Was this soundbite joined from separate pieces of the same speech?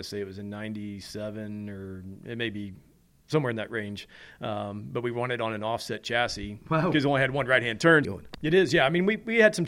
yes; 1 cut; at 8.0 s

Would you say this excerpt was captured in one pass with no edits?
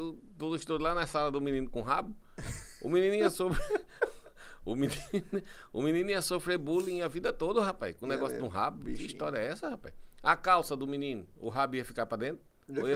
yes; 0 cuts

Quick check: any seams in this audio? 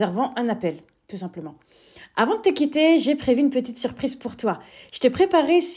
no; 0 cuts

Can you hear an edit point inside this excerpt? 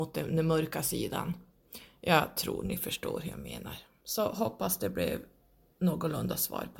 no; 0 cuts

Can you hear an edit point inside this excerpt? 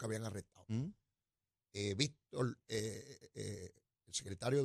no; 0 cuts

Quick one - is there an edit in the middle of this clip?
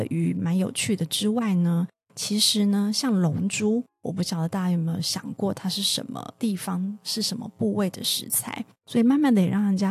yes; 1 cut; at 8.7 s

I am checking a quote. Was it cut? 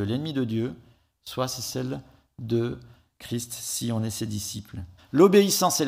yes; 1 cut; at 5.0 s

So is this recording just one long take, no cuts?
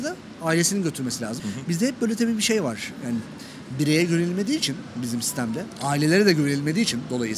no; 1 cut; at 1.4 s

